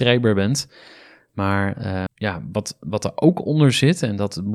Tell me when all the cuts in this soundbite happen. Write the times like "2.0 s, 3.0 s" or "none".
2.1 s